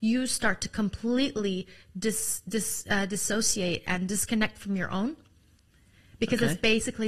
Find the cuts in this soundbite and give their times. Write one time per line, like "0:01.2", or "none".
none